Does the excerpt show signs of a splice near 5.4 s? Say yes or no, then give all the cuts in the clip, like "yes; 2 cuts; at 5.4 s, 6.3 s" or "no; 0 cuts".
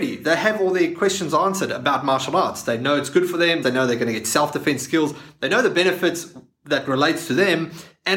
no; 1 cut; at 3.6 s